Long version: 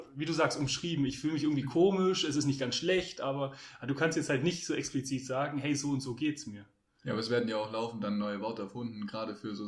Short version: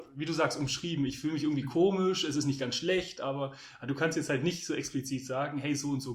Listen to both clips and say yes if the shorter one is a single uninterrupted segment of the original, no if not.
yes